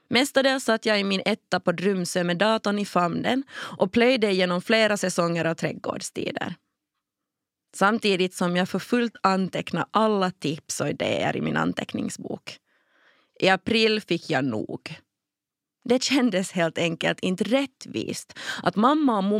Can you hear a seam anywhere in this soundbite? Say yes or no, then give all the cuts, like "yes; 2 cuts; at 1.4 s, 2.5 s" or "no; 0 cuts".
no; 0 cuts